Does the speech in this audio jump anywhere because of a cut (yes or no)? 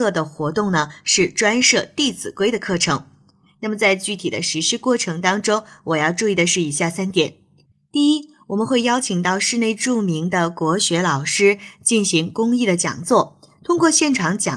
no